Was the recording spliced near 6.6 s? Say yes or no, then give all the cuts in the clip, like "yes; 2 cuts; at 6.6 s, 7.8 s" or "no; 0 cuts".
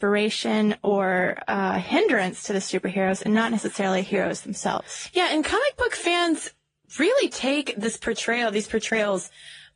no; 0 cuts